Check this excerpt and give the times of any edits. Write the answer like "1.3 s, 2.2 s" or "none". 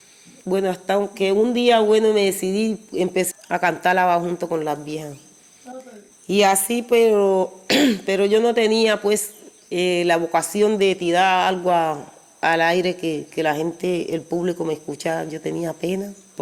3.3 s, 6.1 s